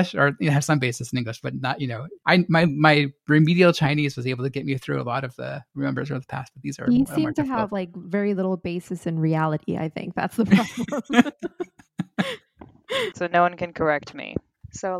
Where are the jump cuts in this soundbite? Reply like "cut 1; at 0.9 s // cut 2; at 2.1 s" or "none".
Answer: cut 1; at 13.1 s